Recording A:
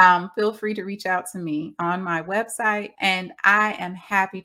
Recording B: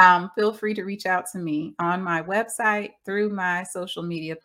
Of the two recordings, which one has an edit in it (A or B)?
A